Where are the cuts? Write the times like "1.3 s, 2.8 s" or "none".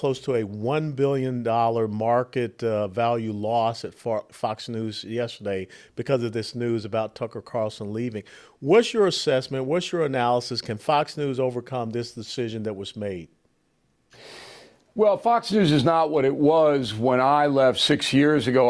none